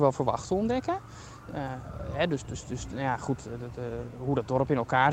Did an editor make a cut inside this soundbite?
no; 0 cuts

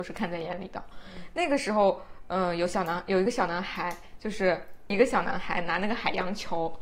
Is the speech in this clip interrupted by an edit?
no; 0 cuts

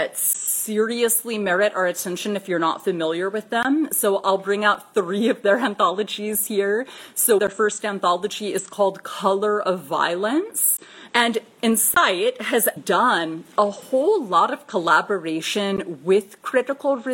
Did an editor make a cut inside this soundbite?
yes; 3 cuts; at 7.4 s, 11.1 s, 12.8 s

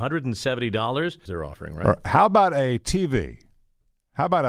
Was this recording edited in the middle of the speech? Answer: yes; 1 cut; at 1.3 s

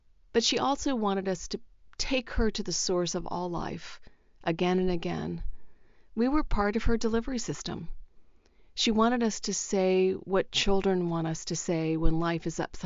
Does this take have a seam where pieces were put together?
no; 0 cuts

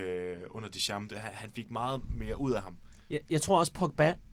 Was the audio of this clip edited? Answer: no; 0 cuts

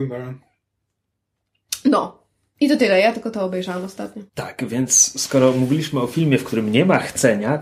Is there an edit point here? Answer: yes; 1 cut; at 4.3 s

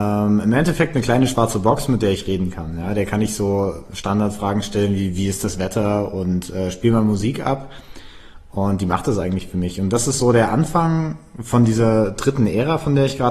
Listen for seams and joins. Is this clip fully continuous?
yes; 0 cuts

